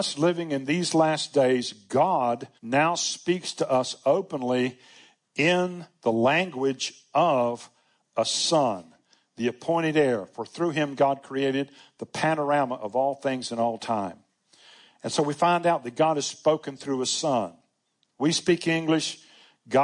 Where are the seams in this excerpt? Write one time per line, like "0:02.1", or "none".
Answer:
0:02.6